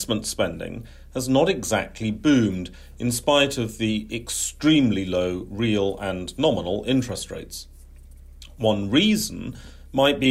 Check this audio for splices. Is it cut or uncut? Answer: uncut